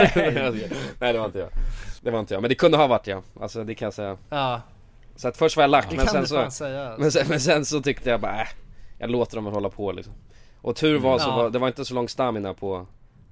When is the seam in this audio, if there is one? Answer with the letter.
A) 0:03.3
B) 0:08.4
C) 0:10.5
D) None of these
D